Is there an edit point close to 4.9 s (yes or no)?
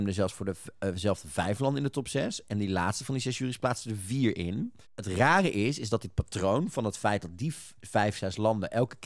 yes